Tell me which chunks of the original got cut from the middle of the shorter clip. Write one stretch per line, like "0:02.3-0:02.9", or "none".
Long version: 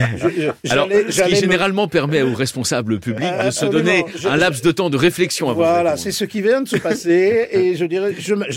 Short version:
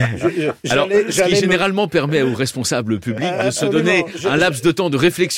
none